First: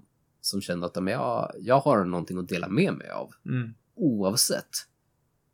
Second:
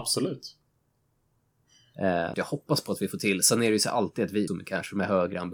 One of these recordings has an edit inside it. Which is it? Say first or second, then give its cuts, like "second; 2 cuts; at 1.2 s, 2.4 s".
second; 2 cuts; at 2.3 s, 4.5 s